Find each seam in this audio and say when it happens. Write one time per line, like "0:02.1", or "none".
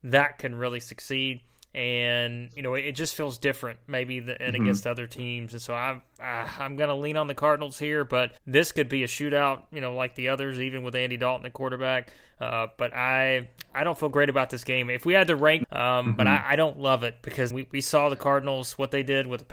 0:08.4
0:15.6
0:17.5